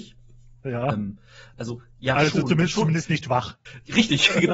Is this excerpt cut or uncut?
uncut